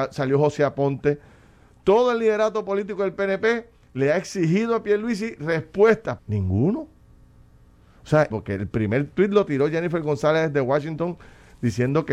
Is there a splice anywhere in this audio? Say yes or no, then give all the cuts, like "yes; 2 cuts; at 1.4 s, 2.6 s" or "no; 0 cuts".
yes; 2 cuts; at 6.2 s, 8.3 s